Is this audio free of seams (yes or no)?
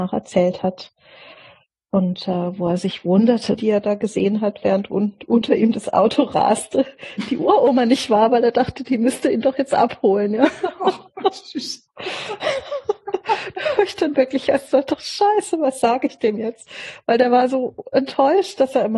no